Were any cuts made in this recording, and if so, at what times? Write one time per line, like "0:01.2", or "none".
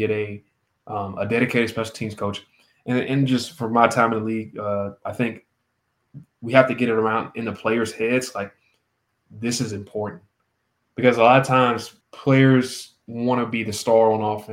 0:05.0
0:12.0